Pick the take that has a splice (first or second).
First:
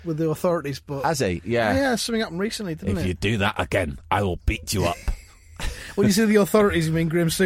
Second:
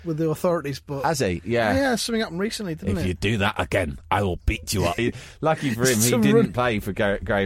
second